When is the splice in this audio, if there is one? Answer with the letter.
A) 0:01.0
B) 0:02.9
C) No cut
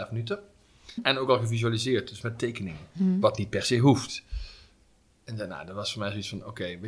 A